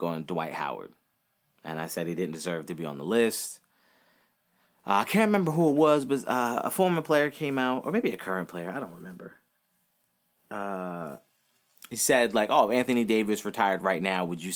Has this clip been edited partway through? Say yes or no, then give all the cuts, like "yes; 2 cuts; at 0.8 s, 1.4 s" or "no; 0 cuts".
no; 0 cuts